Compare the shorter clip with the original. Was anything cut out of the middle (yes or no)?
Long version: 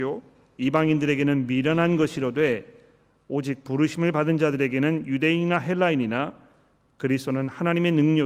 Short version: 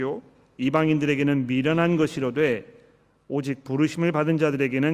no